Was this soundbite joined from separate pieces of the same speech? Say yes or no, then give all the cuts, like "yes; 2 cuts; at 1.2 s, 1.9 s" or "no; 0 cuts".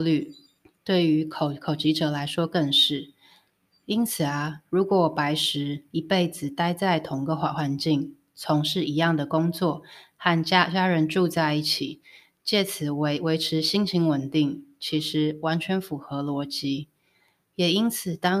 no; 0 cuts